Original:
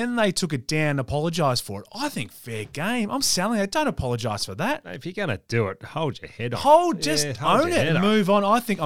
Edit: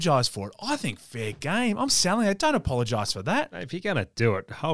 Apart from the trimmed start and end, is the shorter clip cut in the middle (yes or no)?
no